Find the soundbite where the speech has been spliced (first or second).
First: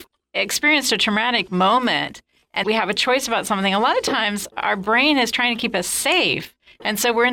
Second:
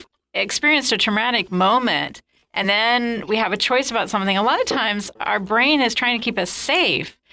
first